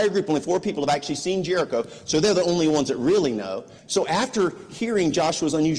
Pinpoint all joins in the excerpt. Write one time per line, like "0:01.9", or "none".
0:03.8